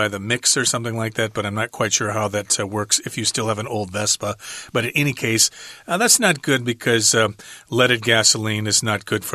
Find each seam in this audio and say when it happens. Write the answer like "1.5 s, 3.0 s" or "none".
none